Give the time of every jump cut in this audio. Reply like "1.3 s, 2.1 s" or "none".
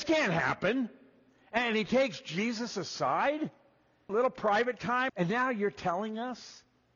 4.1 s, 5.1 s